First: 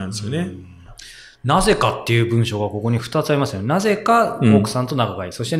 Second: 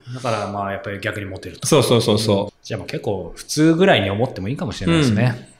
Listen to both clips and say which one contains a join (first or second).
second